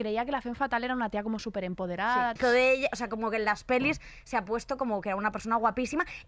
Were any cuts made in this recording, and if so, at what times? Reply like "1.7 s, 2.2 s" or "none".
2.4 s

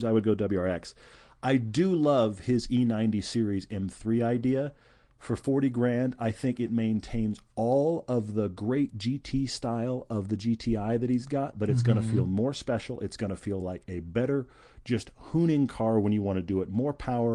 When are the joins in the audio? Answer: none

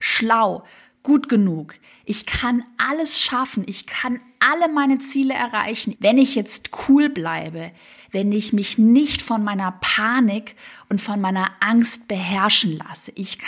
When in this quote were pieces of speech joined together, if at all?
5.9 s, 8.0 s

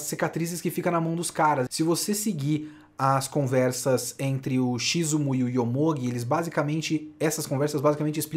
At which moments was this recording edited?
1.7 s

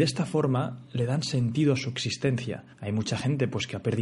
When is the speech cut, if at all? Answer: 2.7 s

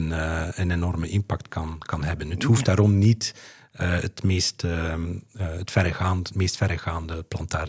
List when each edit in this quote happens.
none

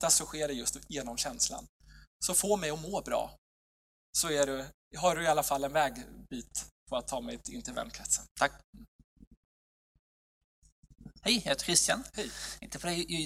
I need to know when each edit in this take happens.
8.3 s

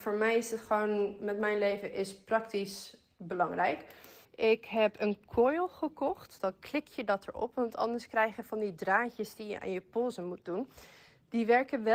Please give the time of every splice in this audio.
4.2 s, 6.4 s

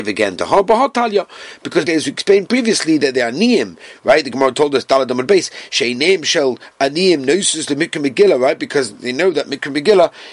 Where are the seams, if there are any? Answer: 1.9 s

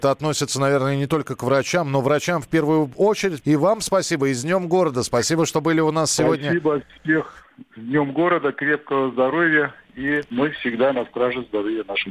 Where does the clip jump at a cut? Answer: 3.4 s

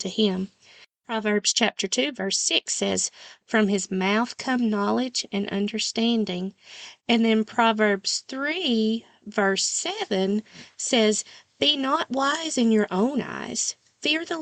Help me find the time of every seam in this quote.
3.4 s

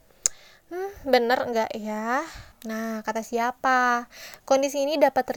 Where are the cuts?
2.5 s, 4.4 s

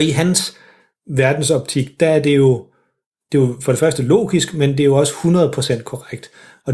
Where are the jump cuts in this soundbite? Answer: none

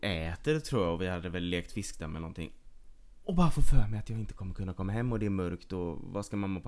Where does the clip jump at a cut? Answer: none

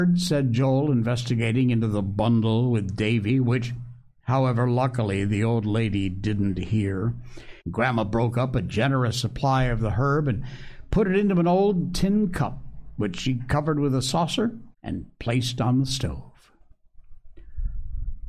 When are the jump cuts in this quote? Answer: 7.6 s, 14.7 s

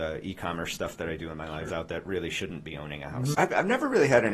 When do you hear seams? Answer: 1.7 s, 3.3 s

